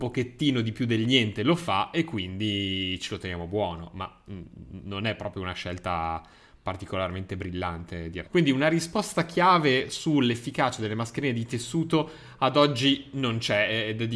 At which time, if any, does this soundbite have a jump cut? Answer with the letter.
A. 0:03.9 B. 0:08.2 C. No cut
B